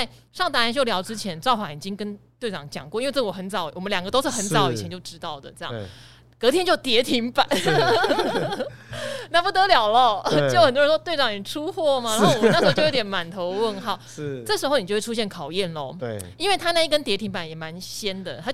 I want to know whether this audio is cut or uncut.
uncut